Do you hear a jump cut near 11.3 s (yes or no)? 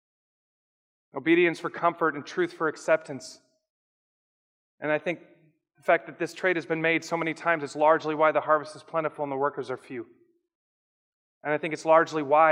no